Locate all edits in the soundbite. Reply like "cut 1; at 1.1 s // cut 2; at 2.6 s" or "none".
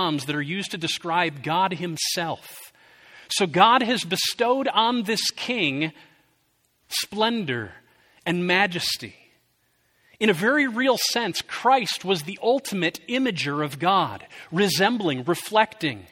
none